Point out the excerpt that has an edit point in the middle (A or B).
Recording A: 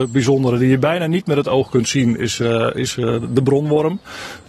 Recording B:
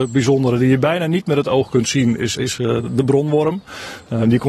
B